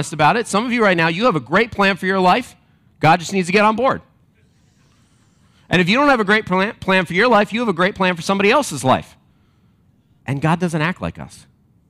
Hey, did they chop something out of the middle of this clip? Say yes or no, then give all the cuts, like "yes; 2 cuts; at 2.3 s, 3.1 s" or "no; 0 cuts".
yes; 1 cut; at 10.2 s